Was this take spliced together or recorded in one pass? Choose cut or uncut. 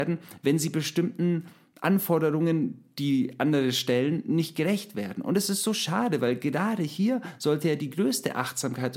uncut